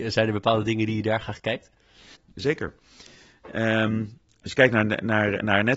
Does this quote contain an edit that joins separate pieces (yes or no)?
no